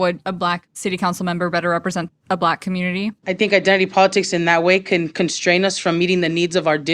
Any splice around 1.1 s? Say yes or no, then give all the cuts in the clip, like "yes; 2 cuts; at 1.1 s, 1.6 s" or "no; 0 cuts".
no; 1 cut; at 3.2 s